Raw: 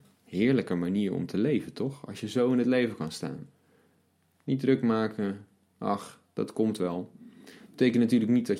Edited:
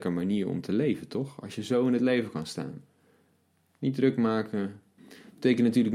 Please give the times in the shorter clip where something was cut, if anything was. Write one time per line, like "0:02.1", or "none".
0:05.0